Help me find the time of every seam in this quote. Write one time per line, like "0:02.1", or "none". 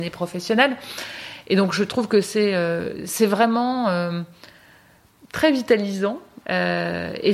0:06.4